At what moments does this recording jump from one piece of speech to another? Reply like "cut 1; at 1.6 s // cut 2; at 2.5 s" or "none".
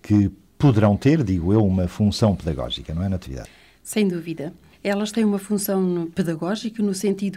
none